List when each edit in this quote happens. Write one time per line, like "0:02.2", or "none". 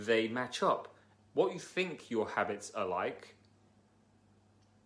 0:01.2